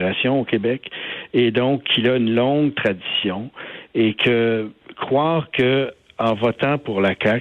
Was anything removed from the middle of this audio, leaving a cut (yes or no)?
no